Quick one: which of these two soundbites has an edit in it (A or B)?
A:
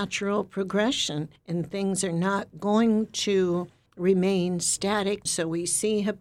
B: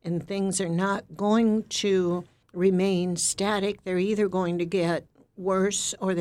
A